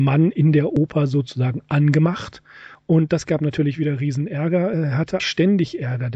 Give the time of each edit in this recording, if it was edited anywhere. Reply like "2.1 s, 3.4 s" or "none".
5.2 s